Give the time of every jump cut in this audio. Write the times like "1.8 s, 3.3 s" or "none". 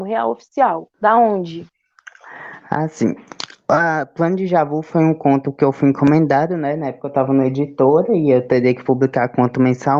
0.9 s